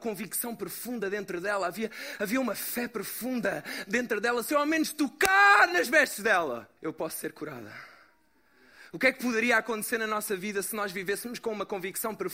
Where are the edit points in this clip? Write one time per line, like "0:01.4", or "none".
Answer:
0:06.8